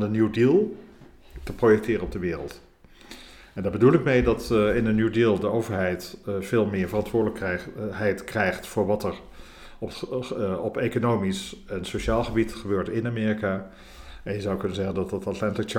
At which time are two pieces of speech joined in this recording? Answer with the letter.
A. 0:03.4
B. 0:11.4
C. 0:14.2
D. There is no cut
D